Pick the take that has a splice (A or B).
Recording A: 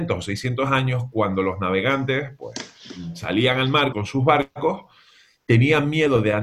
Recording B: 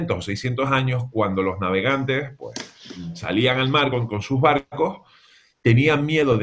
A